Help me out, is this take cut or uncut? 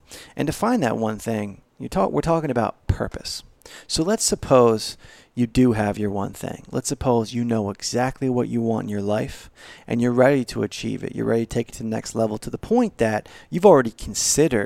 uncut